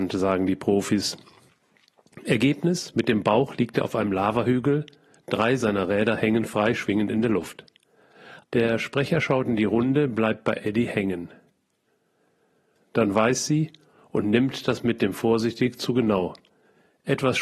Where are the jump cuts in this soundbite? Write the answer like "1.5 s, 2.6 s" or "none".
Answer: 8.4 s, 12.7 s